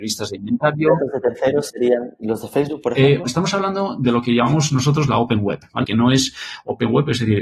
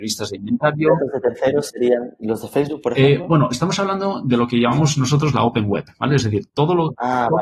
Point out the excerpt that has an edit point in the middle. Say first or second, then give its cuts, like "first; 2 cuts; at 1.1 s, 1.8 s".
first; 2 cuts; at 3.2 s, 5.8 s